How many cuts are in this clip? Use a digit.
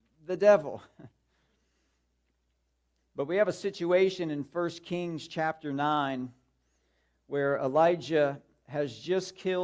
1